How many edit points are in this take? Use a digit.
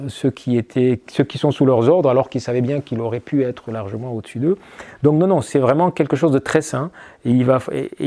0